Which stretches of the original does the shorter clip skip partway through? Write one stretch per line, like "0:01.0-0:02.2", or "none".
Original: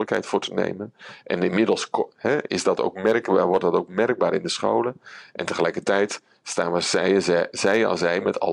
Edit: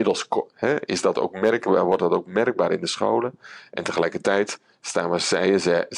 none